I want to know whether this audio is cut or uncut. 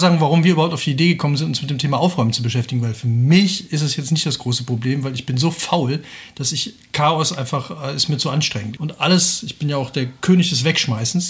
cut